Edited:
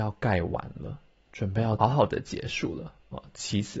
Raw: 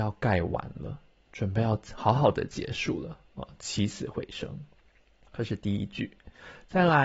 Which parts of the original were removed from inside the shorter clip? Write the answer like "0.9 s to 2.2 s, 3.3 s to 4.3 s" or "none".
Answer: 1.8 s to 2.1 s